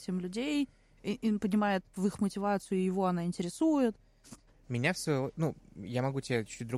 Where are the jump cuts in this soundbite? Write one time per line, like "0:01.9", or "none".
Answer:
0:04.5